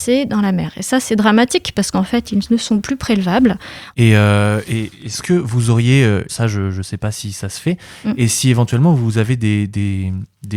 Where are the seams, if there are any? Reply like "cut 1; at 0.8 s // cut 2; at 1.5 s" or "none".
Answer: cut 1; at 3.9 s // cut 2; at 6.3 s